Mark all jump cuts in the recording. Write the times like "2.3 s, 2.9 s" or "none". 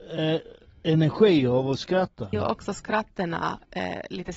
2.3 s